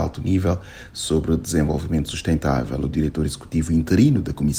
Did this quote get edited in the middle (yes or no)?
no